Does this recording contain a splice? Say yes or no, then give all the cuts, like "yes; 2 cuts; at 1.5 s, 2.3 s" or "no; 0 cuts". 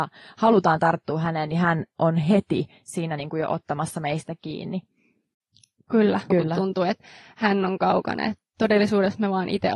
yes; 1 cut; at 6.3 s